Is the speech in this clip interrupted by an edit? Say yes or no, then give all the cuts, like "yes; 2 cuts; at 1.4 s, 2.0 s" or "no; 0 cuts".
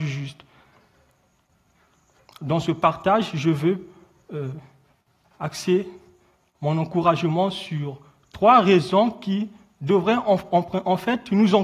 no; 0 cuts